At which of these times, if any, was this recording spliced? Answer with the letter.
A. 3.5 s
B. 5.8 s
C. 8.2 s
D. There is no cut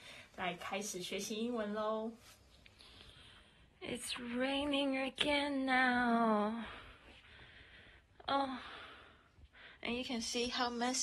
D